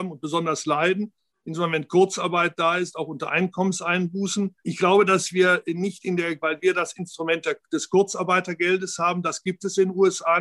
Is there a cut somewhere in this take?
yes; 2 cuts; at 4.6 s, 6.4 s

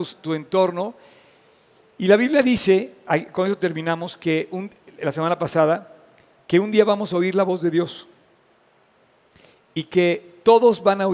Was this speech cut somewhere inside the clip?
no; 0 cuts

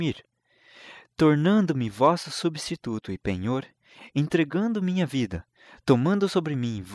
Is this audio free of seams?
yes; 0 cuts

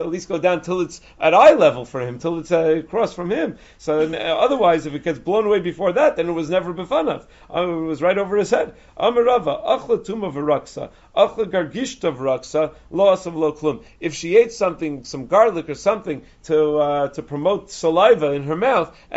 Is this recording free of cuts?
yes; 0 cuts

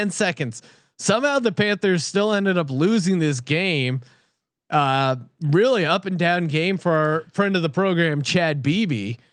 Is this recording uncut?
yes; 0 cuts

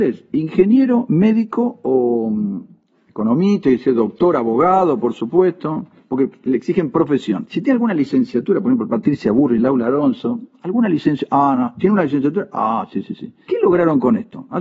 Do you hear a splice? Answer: no; 0 cuts

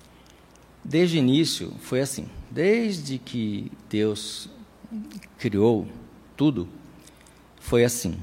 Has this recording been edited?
no; 0 cuts

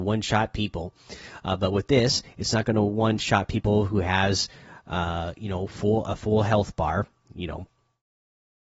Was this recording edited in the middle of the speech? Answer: no; 0 cuts

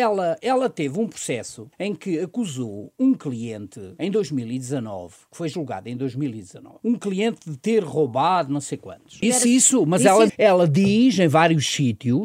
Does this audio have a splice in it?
yes; 2 cuts; at 9.2 s, 10.3 s

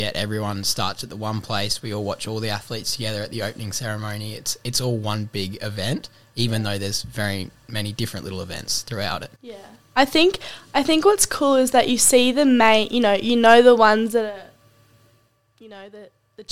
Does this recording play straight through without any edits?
no; 1 cut; at 9.4 s

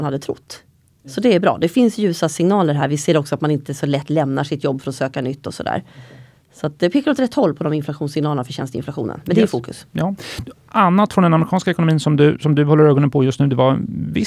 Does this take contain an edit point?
no; 0 cuts

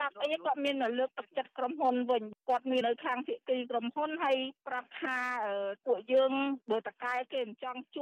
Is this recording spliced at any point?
yes; 1 cut; at 2.8 s

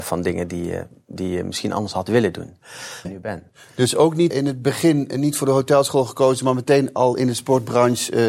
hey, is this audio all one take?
no; 2 cuts; at 3.0 s, 4.3 s

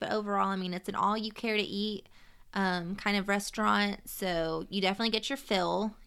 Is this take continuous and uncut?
yes; 0 cuts

